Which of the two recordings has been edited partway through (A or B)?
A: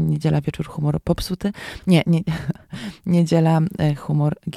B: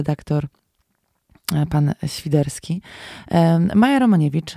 A